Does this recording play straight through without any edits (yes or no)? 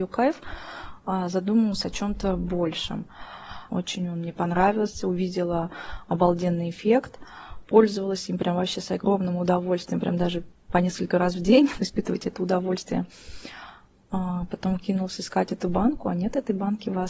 no